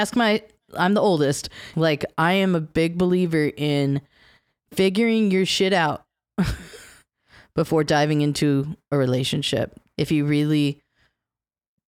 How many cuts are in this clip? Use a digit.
2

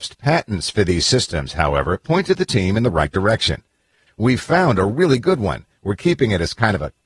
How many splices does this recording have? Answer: 1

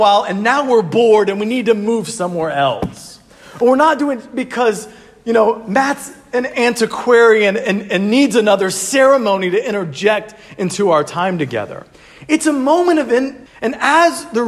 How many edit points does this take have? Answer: 1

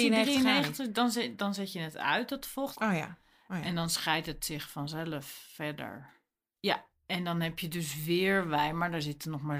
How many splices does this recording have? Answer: 2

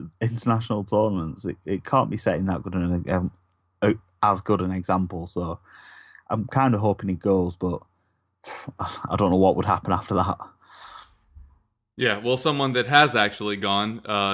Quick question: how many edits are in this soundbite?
0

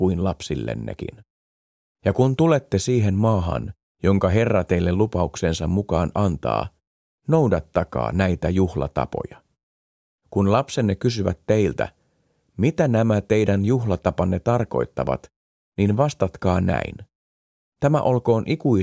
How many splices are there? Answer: 1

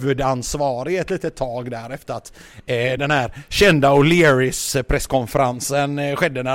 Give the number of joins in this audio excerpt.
0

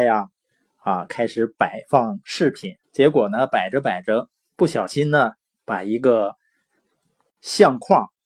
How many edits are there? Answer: 1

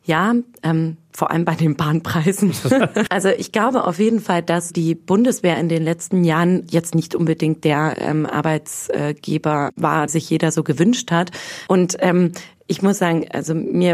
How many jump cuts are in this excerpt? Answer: 3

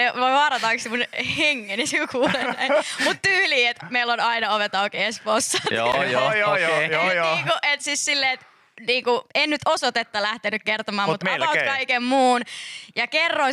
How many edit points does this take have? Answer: 1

